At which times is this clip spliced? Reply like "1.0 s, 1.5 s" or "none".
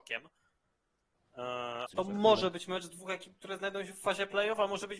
1.9 s